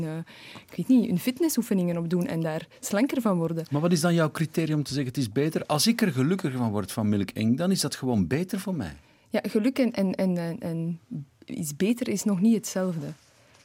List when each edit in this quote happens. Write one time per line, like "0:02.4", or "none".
none